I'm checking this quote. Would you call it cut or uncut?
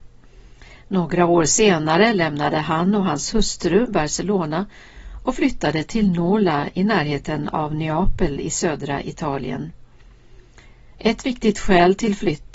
uncut